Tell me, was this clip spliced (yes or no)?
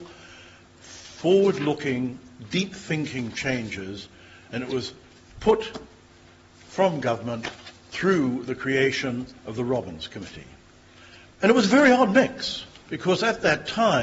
yes